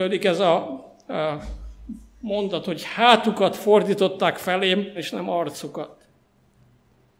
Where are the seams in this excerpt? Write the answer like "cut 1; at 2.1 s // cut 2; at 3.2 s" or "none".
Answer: cut 1; at 5.0 s